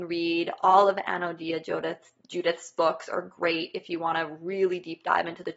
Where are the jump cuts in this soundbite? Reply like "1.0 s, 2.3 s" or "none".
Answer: none